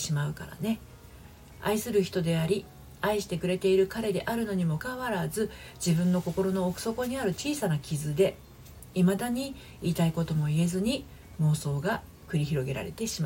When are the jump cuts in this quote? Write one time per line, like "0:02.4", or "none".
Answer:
0:04.8